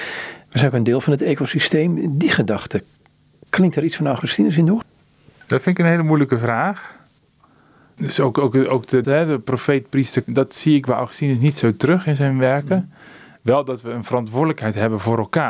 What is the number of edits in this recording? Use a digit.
2